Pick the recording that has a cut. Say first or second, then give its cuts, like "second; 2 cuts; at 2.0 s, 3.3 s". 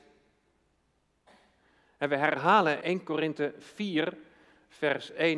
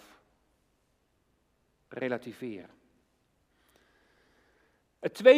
first; 1 cut; at 2.8 s